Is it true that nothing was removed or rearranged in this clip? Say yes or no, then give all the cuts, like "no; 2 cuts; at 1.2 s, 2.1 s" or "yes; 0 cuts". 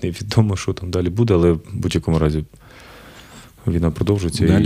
yes; 0 cuts